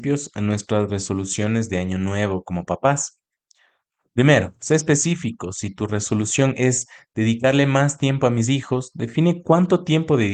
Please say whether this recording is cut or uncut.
uncut